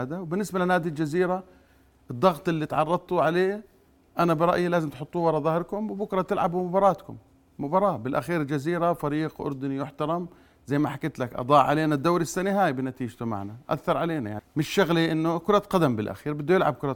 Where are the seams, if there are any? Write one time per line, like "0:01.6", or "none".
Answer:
0:14.4

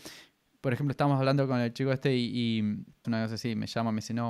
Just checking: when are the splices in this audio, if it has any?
0:03.0

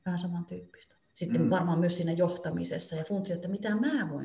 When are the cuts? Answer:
0:01.0

